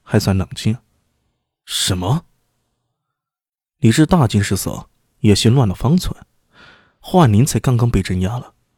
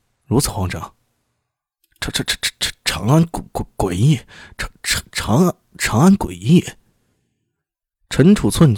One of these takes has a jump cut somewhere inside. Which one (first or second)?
first